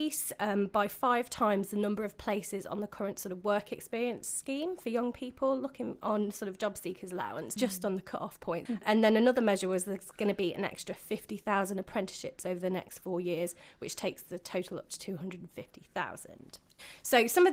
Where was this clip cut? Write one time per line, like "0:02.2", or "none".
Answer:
0:07.6
0:08.7